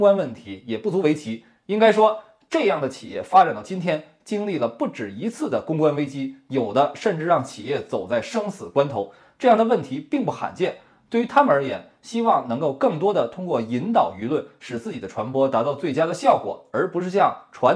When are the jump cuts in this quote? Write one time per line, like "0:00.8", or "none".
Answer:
none